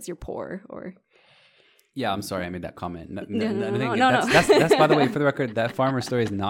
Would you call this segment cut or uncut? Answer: uncut